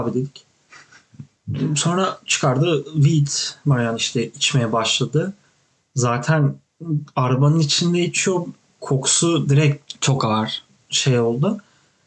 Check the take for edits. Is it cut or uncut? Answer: uncut